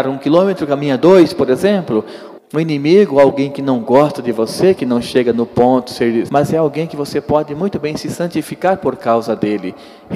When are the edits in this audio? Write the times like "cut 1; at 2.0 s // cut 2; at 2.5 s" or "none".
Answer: cut 1; at 2.4 s // cut 2; at 6.3 s